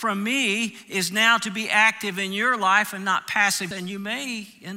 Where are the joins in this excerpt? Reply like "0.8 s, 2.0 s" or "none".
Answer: 3.7 s